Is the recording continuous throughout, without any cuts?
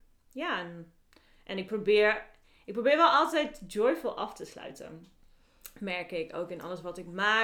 yes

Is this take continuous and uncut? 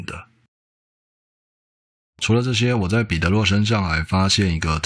yes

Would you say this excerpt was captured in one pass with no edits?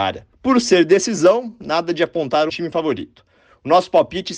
no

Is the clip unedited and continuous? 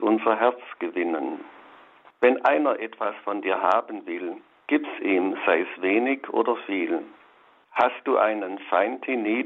no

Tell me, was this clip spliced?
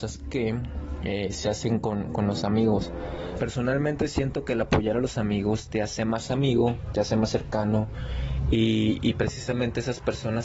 yes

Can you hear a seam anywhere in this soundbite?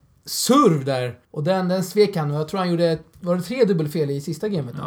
yes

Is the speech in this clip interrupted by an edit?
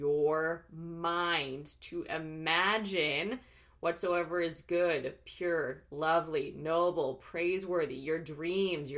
no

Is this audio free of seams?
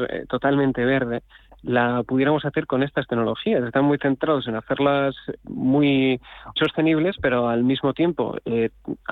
no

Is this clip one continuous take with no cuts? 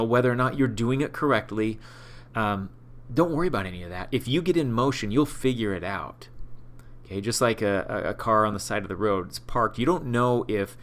yes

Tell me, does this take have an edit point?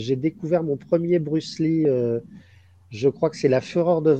no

